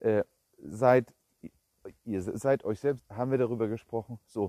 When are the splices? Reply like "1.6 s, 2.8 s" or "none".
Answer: 3.0 s